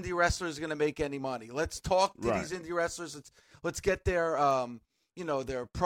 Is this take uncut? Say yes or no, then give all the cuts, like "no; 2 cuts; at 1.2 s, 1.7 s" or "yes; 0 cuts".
yes; 0 cuts